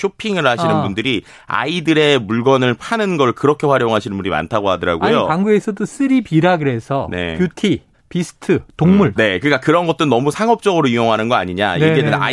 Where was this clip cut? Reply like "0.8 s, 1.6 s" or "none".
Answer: 7.9 s, 9.2 s

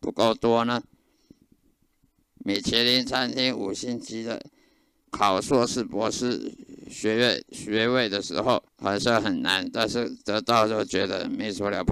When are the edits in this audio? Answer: 2.3 s, 5.0 s, 8.7 s

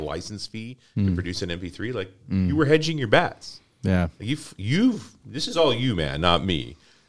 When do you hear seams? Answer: none

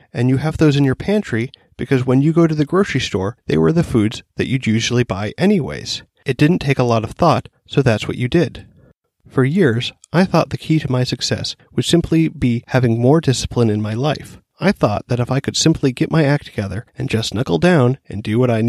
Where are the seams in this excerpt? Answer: none

